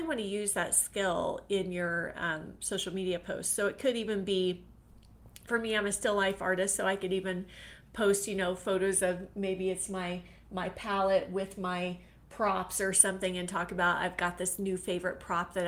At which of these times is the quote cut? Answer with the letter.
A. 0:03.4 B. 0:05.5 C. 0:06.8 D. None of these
B